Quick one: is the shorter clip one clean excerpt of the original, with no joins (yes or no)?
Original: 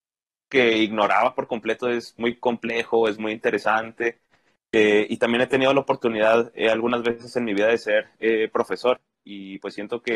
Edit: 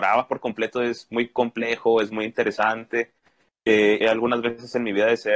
no